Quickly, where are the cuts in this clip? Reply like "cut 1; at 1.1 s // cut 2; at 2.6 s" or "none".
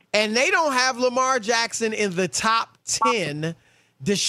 none